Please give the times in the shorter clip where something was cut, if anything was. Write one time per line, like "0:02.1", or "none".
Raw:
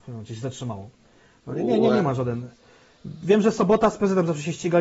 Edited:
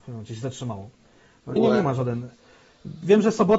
0:01.6